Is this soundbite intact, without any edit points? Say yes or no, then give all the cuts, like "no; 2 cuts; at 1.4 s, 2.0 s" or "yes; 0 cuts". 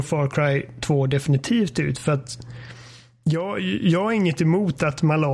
yes; 0 cuts